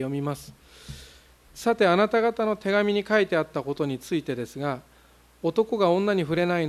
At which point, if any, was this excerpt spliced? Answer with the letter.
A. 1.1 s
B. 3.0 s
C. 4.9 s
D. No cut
D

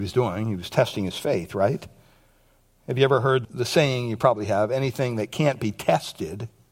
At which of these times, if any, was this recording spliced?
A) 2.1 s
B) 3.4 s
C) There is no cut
B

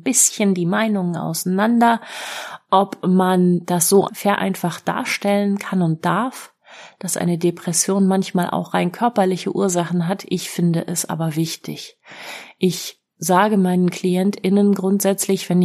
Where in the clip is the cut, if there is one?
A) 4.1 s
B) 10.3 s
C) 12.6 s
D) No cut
A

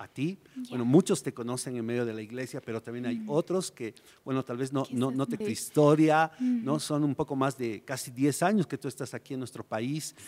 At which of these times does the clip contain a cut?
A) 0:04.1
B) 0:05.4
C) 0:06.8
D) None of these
B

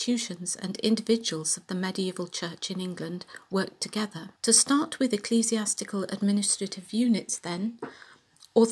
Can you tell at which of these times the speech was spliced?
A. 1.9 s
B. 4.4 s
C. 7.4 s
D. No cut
B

